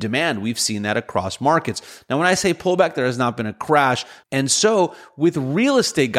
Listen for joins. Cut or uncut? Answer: cut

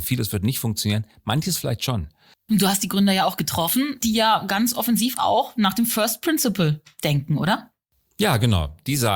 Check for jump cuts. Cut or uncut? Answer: cut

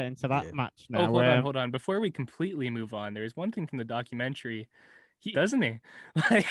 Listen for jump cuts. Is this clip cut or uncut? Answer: cut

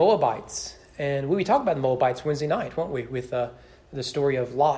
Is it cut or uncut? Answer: uncut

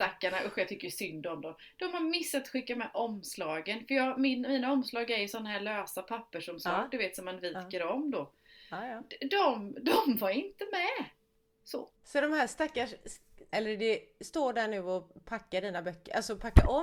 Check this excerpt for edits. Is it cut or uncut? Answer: cut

